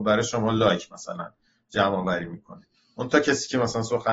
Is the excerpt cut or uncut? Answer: uncut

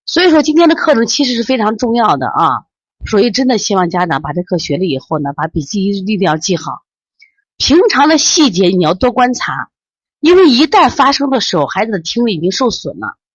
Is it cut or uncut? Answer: uncut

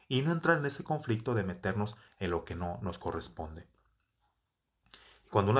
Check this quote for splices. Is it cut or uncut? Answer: uncut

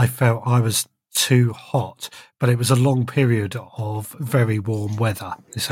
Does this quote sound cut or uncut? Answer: uncut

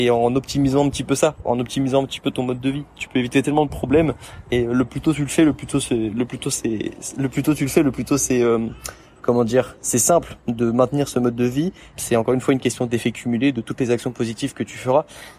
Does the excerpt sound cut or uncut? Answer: cut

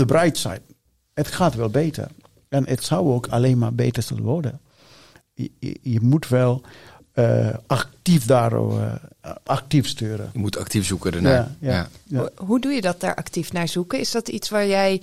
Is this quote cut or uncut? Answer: uncut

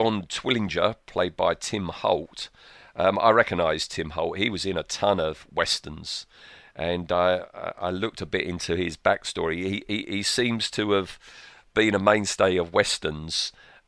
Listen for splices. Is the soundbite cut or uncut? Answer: uncut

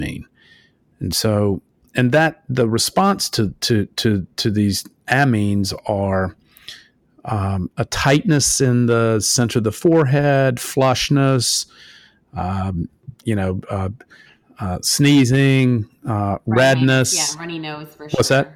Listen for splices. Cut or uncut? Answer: uncut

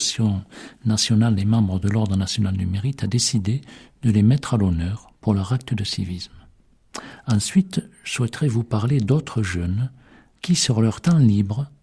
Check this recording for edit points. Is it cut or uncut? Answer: cut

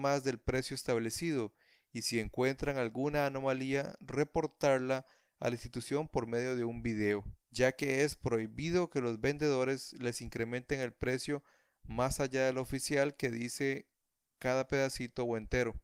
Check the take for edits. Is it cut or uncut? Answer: cut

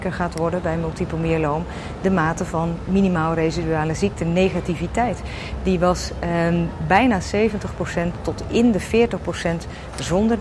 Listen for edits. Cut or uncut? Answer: uncut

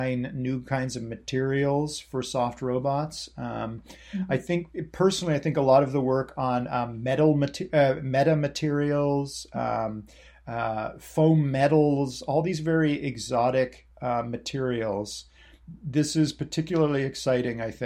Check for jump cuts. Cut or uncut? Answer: uncut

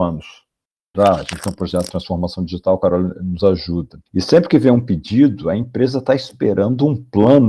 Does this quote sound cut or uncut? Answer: cut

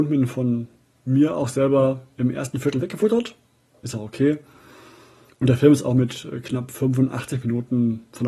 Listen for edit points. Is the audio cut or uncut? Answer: uncut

